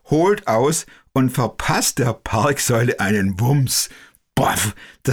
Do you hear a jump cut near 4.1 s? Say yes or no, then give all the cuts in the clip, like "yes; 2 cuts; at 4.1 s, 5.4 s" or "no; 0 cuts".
no; 0 cuts